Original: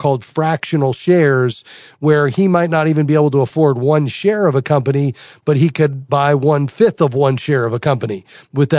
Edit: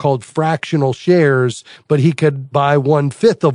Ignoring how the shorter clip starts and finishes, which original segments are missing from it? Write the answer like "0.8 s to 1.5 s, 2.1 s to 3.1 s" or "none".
1.7 s to 5.3 s